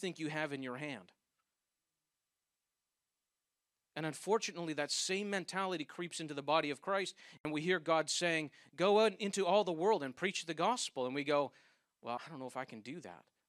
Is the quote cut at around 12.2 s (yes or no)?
yes